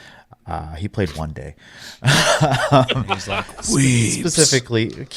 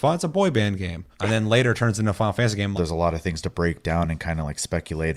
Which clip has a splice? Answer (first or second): second